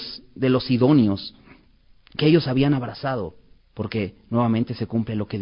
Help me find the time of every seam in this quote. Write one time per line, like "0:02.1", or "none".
0:03.6